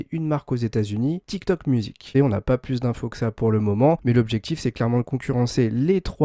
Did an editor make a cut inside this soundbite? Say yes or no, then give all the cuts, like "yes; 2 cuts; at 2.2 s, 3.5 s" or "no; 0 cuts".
yes; 1 cut; at 2.1 s